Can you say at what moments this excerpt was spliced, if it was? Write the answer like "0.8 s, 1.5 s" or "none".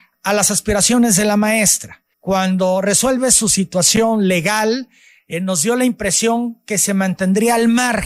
2.1 s